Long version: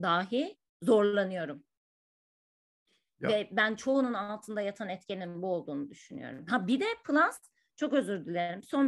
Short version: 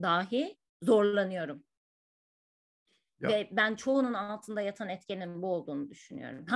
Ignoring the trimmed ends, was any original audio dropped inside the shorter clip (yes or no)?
no